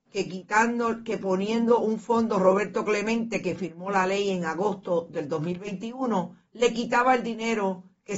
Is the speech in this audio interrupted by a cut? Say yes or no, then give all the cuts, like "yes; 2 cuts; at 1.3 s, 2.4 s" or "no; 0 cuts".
no; 0 cuts